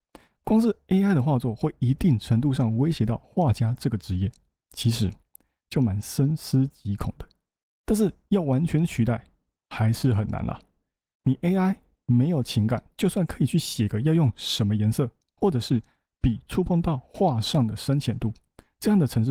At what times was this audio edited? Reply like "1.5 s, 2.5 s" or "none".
15.3 s